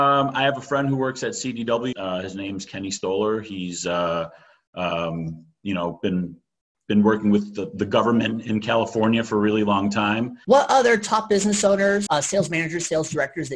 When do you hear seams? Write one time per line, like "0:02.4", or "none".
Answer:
0:01.9
0:10.4
0:12.1